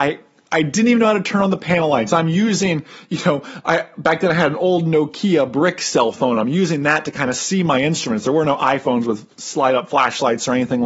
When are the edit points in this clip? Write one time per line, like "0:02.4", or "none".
none